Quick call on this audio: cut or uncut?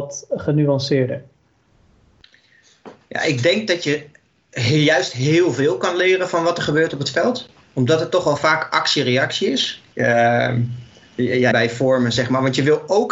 cut